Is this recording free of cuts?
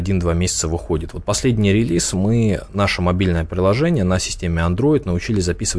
yes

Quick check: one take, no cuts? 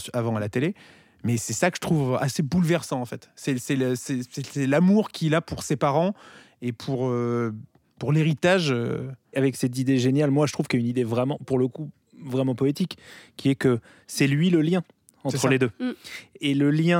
yes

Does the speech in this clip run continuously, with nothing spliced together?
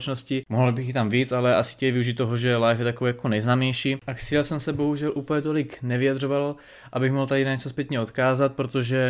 yes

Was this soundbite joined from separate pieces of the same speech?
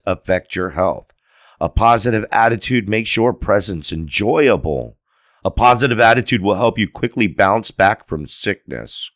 yes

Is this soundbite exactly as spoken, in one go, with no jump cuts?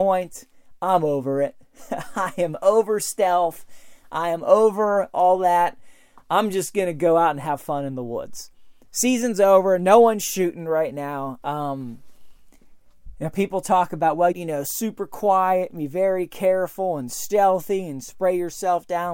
no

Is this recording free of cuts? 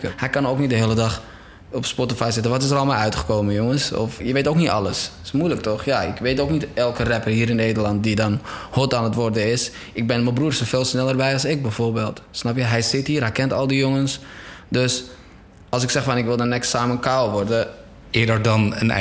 no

